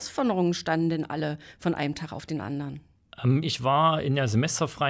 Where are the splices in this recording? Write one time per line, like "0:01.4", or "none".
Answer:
0:03.4